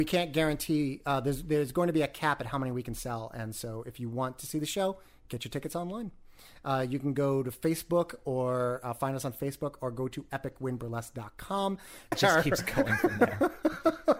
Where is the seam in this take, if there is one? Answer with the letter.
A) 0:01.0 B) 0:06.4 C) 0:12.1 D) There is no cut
C